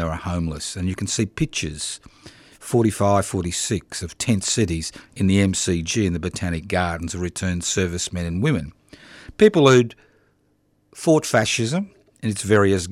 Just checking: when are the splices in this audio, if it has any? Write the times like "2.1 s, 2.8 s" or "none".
none